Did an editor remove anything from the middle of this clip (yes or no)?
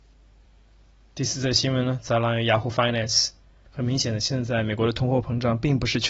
no